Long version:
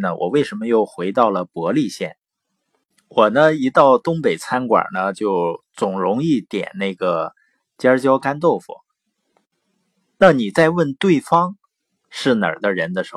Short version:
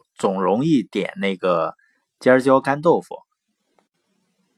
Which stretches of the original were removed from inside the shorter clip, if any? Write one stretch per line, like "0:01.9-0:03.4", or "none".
none